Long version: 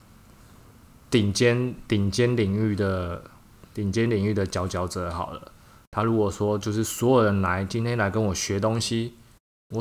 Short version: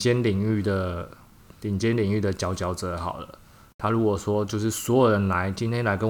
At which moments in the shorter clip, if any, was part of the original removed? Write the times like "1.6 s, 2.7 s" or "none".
none